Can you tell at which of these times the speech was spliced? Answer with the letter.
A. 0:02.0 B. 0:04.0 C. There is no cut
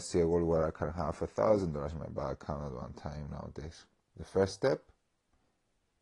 B